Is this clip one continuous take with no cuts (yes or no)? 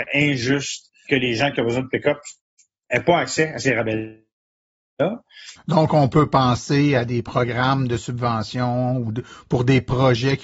no